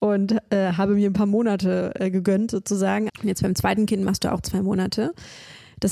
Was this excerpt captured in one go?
no; 1 cut; at 3.1 s

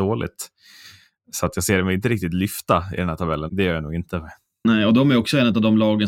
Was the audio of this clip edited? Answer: yes; 1 cut; at 3.5 s

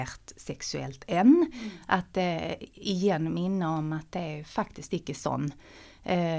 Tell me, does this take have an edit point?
no; 0 cuts

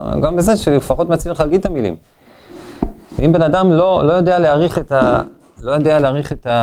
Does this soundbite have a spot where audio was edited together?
no; 0 cuts

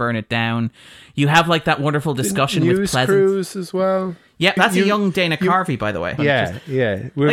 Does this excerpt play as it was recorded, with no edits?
no; 2 cuts; at 4.6 s, 6.2 s

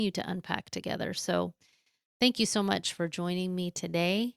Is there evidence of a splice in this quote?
no; 0 cuts

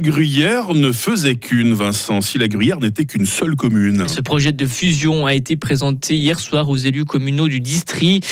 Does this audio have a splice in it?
no; 0 cuts

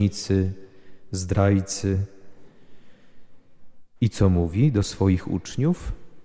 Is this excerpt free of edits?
no; 1 cut; at 4.0 s

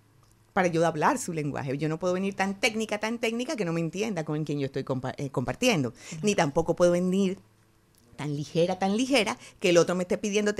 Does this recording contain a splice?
no; 0 cuts

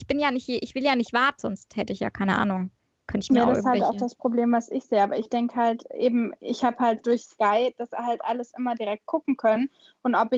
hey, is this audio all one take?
no; 1 cut; at 1.4 s

